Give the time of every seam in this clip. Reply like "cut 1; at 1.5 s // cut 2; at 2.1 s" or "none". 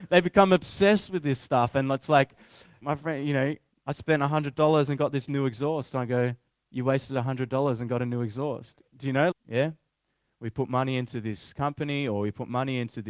cut 1; at 2.8 s // cut 2; at 9.3 s